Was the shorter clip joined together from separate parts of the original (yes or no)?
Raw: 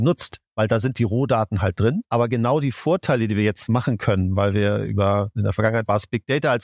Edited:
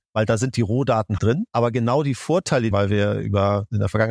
yes